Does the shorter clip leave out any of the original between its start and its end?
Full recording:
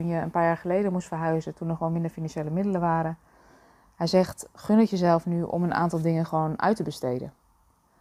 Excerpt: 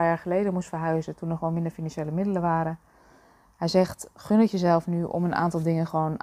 no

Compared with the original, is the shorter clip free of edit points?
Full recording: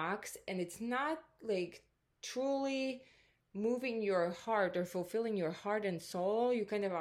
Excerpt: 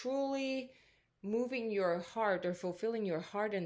yes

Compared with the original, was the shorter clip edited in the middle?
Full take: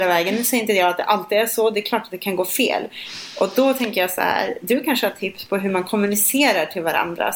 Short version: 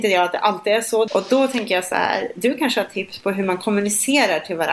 yes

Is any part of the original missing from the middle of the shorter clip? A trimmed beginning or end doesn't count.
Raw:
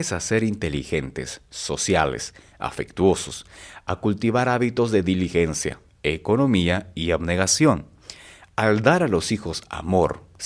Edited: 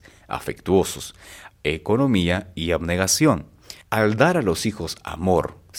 yes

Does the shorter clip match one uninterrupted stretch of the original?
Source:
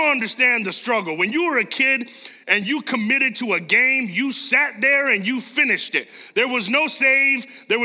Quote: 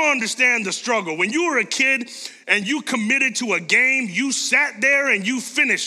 yes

